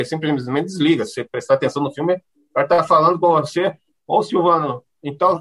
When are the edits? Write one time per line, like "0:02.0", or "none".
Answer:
none